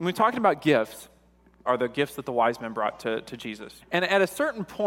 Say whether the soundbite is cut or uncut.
cut